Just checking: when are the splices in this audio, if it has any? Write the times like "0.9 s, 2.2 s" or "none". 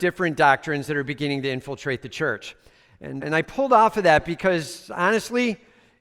3.2 s